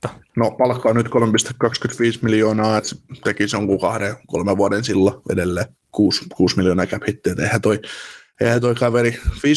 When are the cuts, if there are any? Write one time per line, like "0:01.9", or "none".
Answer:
0:02.8